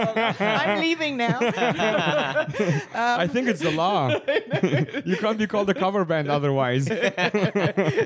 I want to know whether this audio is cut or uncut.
uncut